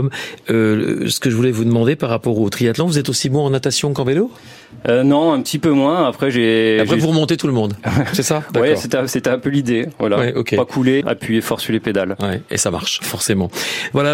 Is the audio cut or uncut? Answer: cut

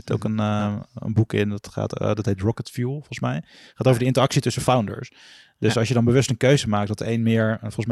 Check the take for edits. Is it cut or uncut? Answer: uncut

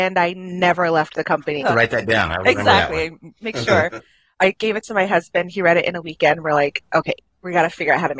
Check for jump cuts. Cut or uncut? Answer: cut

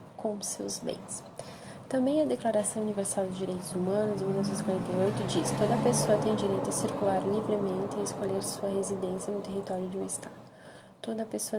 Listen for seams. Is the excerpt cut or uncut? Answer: uncut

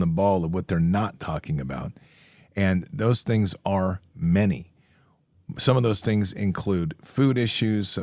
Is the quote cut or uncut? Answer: uncut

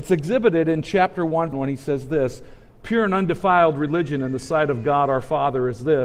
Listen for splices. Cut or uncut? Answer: cut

